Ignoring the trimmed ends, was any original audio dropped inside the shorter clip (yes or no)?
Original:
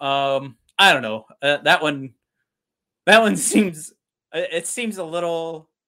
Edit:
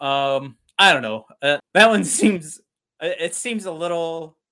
yes